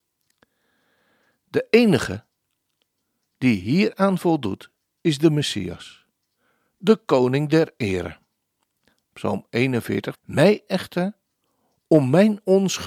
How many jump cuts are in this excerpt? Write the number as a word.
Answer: one